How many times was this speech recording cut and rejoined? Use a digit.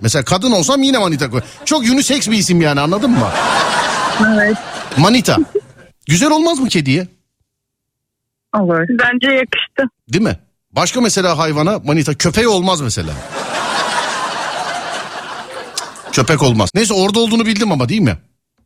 2